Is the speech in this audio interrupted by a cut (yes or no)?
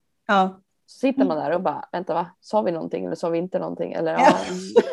no